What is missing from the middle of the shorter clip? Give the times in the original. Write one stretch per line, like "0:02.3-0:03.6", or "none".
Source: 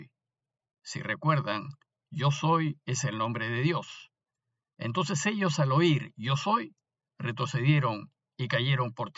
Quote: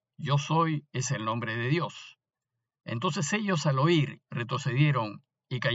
0:06.1-0:07.1